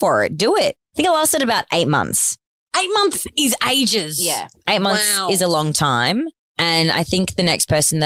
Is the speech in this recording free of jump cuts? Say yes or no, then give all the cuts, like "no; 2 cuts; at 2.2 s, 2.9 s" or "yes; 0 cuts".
yes; 0 cuts